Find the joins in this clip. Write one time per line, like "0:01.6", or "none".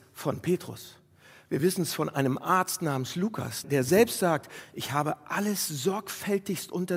0:03.6